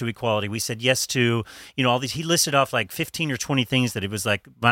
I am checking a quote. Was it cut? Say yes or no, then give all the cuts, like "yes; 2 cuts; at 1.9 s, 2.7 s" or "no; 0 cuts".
no; 0 cuts